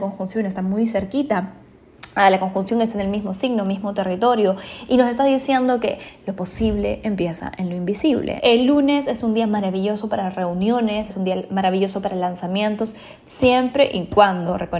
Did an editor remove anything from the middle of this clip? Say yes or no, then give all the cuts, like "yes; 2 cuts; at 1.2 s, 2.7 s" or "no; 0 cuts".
yes; 2 cuts; at 8.4 s, 11.1 s